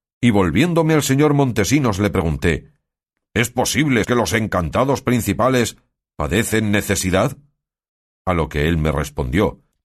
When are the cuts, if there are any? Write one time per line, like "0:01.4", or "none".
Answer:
0:04.0